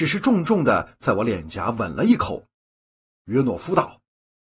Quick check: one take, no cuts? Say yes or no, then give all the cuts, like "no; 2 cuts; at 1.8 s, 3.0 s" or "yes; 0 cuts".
yes; 0 cuts